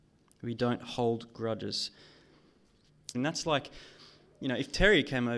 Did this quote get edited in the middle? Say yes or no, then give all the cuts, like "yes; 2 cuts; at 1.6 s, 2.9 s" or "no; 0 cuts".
yes; 1 cut; at 3.1 s